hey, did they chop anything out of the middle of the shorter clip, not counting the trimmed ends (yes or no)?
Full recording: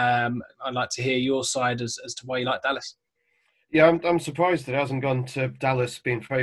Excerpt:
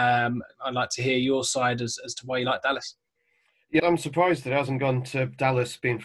yes